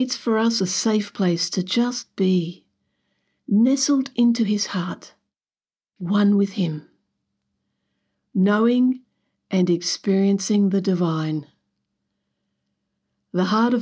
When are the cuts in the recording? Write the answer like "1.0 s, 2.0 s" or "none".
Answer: none